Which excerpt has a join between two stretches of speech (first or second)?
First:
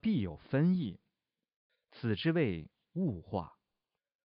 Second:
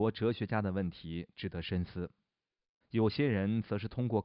second